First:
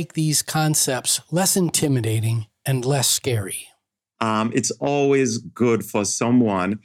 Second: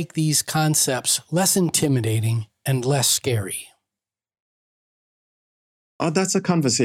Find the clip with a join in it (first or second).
first